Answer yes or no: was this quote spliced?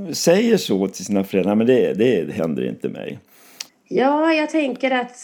yes